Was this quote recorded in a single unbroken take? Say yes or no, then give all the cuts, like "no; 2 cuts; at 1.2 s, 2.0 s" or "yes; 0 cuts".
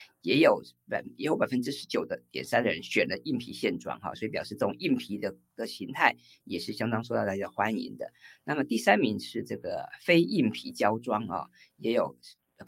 yes; 0 cuts